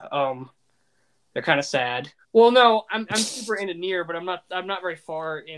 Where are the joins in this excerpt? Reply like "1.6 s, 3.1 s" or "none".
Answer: 2.2 s

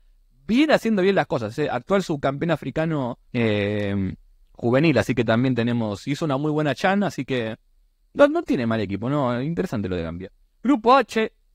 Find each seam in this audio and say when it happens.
3.3 s

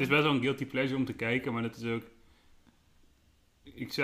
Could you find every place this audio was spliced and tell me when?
none

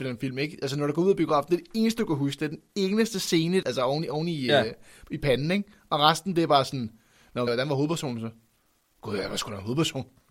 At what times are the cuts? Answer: 3.6 s, 7.5 s

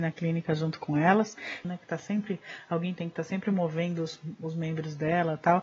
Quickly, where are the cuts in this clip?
1.6 s

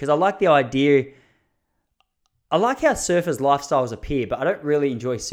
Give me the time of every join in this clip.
none

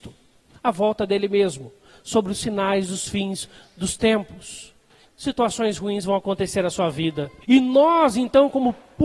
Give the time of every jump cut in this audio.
5.0 s, 7.4 s

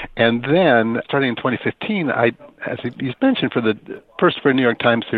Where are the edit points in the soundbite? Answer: 1.0 s

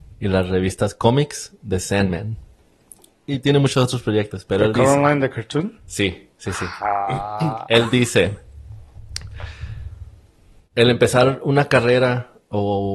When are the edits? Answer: none

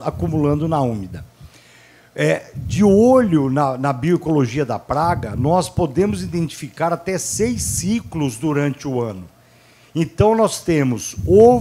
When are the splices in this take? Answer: none

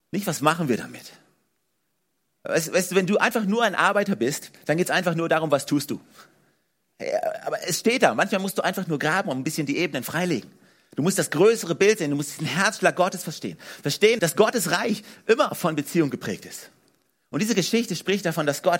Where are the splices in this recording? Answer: 6.9 s, 14.2 s

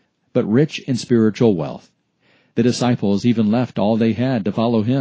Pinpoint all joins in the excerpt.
none

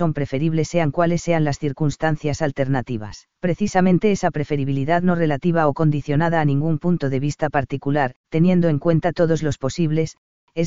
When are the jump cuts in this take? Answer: 3.3 s, 8.2 s

